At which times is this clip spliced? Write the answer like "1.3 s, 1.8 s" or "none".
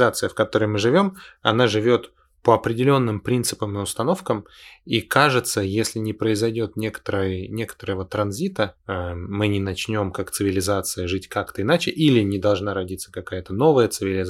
none

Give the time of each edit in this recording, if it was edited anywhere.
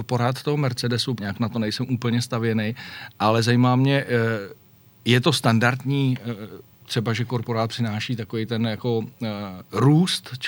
1.2 s

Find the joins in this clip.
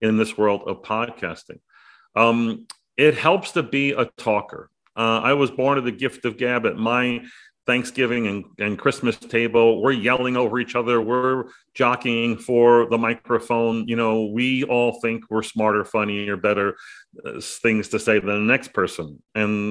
none

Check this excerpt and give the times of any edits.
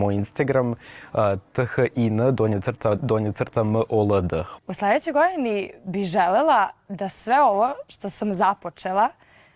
3.0 s, 4.6 s

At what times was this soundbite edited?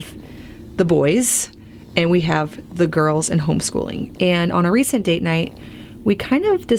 4.1 s

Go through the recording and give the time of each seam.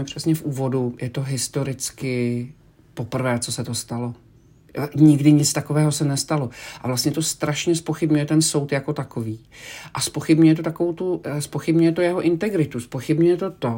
none

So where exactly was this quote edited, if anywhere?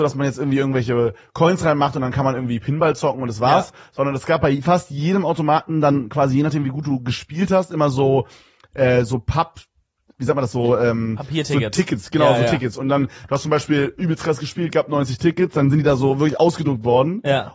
none

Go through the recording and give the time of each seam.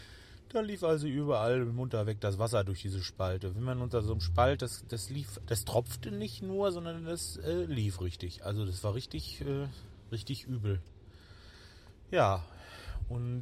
5.4 s

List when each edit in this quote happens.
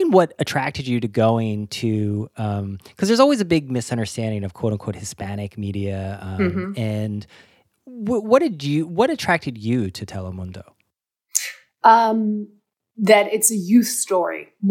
none

